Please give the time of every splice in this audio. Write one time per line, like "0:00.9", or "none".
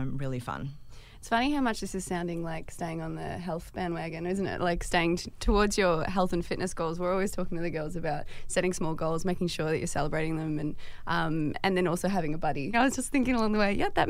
0:12.7

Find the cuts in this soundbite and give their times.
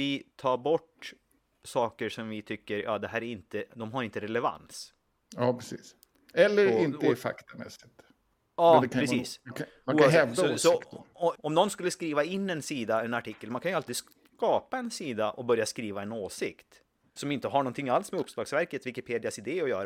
0:11.3
0:17.2

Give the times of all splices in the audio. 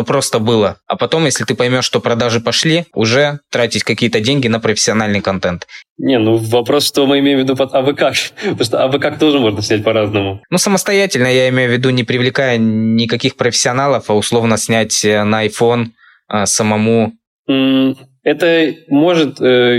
0:05.8

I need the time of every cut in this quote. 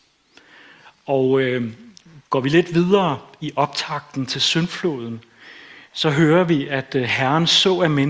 none

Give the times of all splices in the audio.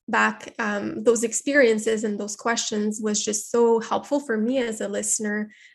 none

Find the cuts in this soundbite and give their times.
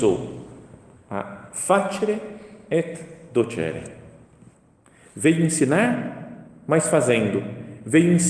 none

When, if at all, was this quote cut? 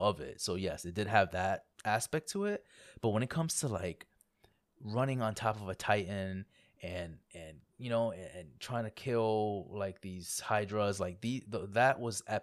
0:01.7

